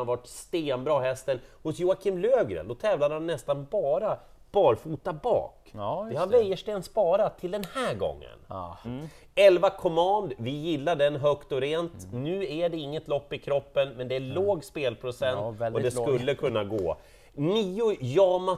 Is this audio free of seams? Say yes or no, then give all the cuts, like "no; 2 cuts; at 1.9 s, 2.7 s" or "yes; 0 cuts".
no; 1 cut; at 8.8 s